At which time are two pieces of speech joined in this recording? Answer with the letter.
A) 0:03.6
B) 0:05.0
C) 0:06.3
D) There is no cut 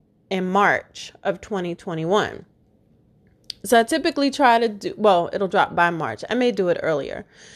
D